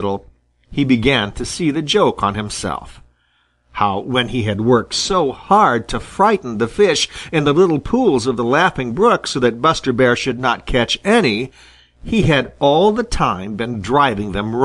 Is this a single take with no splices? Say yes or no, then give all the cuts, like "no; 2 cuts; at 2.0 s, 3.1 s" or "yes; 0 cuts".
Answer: yes; 0 cuts